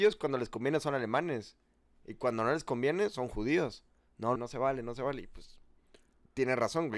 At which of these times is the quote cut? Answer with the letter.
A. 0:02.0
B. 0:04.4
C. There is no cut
B